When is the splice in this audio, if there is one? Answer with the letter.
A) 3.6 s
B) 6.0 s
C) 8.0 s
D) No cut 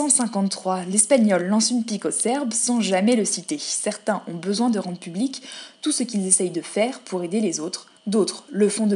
D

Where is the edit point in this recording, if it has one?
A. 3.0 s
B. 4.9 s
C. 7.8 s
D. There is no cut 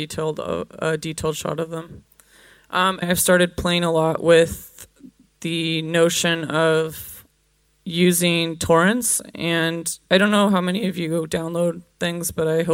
A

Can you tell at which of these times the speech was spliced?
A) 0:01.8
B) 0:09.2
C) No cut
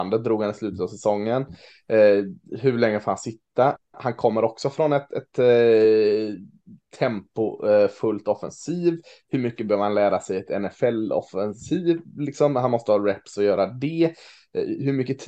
C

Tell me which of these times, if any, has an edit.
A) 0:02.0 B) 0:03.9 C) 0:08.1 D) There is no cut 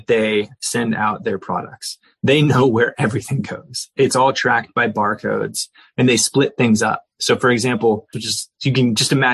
C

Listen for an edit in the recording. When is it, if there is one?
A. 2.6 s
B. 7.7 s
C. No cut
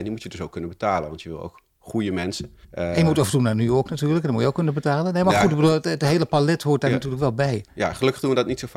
A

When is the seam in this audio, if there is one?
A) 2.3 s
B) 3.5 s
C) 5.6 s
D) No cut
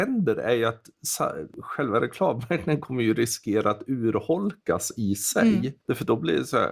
D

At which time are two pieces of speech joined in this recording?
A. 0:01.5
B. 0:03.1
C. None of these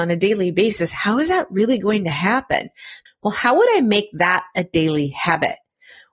B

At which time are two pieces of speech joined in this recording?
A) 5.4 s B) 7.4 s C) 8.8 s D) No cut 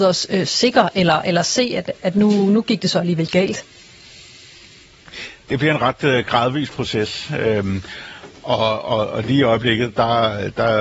D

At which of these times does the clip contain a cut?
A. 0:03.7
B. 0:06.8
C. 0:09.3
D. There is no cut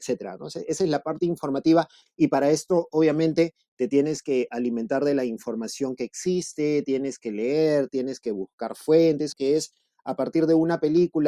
C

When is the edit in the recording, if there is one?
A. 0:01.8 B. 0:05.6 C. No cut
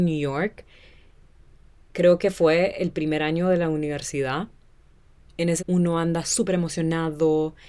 B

